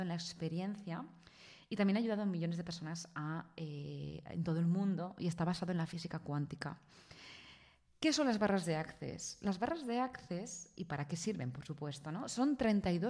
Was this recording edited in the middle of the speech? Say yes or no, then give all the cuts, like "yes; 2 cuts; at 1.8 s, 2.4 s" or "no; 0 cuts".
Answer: no; 0 cuts